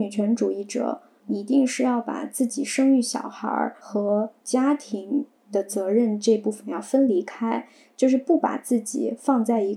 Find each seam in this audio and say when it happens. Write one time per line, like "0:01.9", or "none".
none

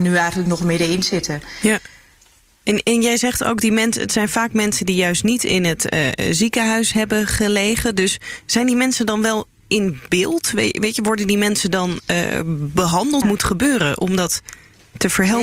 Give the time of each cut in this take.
0:13.2

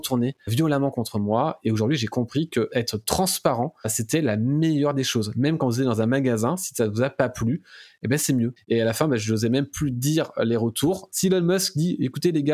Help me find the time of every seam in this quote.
0:08.6
0:11.1

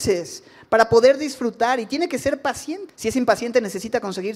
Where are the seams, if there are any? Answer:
0:02.9

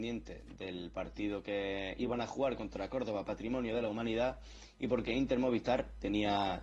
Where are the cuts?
none

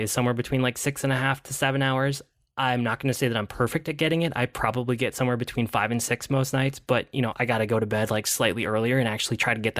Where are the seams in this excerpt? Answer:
0:07.3

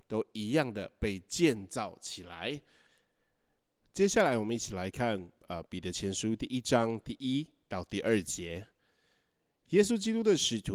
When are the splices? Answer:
none

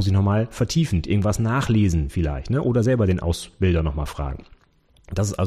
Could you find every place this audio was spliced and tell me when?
none

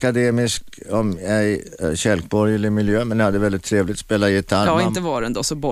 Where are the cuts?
none

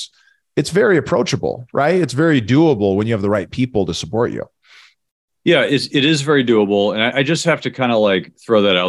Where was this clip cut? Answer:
0:07.1

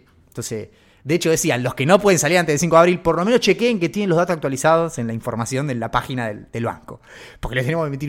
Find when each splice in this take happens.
none

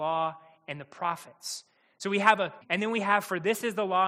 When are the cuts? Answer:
0:02.6

